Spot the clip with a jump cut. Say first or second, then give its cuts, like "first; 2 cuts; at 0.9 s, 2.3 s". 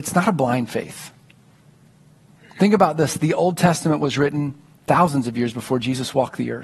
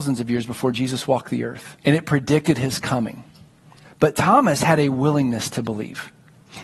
second; 2 cuts; at 1.8 s, 3.8 s